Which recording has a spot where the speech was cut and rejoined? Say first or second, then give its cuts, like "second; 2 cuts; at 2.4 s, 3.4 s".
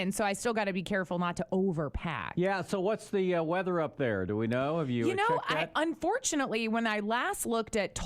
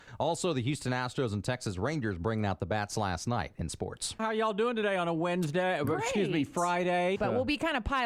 second; 2 cuts; at 4.2 s, 7.2 s